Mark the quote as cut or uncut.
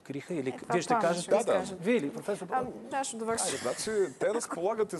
cut